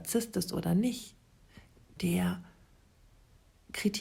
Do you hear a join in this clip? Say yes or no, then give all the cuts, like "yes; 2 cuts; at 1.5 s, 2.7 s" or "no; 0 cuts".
yes; 1 cut; at 1.9 s